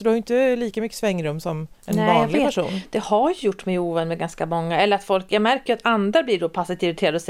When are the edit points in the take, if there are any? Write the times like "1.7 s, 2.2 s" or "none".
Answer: 1.7 s

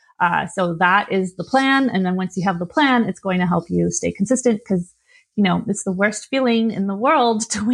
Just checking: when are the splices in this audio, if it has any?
none

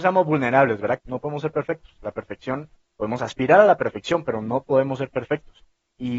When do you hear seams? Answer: 1.0 s

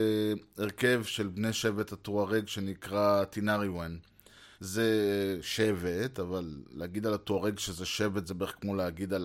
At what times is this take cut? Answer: 4.5 s

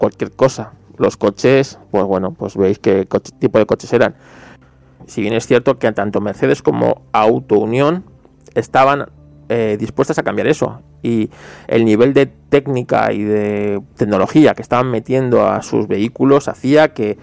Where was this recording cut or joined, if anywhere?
5.0 s

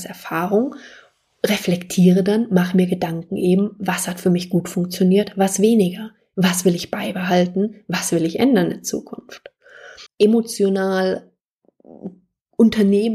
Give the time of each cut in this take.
10.1 s

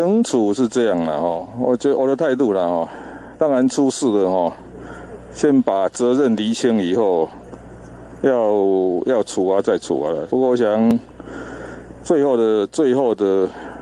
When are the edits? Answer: 2.0 s, 10.3 s

